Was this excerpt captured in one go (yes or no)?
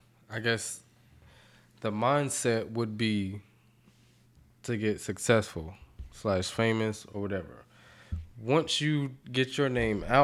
no